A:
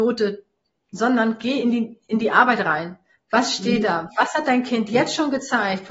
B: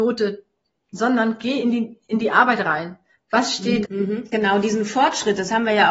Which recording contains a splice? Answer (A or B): B